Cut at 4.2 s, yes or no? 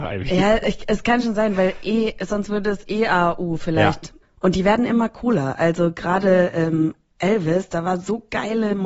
yes